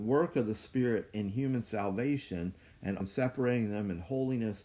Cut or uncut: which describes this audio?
cut